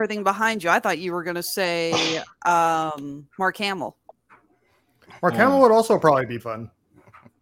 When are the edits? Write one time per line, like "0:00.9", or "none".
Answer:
0:06.4